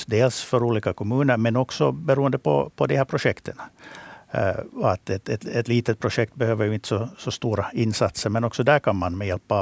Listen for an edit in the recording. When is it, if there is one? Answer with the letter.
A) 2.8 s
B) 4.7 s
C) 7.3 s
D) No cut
D